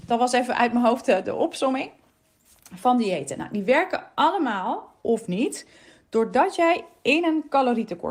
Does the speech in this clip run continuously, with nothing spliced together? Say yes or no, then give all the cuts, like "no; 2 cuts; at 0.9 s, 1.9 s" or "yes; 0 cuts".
yes; 0 cuts